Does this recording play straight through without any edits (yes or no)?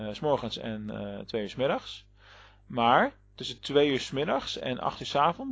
yes